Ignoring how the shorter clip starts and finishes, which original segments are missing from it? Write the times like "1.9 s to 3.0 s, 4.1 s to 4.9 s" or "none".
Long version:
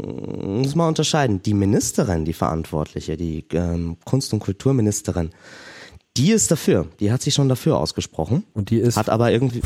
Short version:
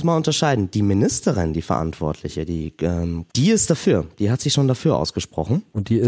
4.0 s to 6.1 s